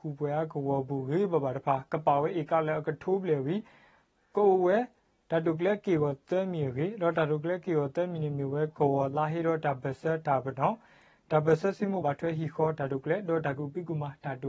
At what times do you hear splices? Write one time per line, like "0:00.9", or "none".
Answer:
0:12.0